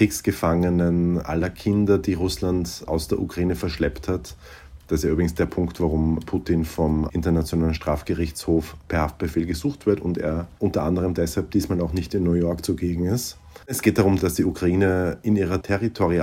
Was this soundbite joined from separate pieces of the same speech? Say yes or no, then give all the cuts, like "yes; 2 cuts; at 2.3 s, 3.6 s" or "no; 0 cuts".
yes; 1 cut; at 13.6 s